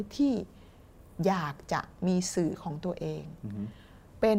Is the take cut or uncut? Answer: uncut